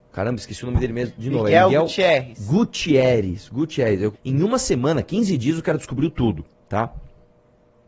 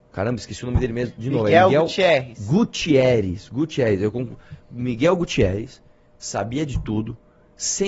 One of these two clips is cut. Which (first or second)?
first